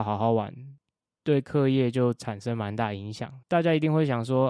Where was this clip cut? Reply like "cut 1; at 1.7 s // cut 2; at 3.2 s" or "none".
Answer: cut 1; at 3.4 s